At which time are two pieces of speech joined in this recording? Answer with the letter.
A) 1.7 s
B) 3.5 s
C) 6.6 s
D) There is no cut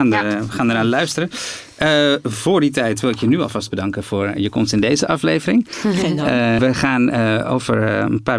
C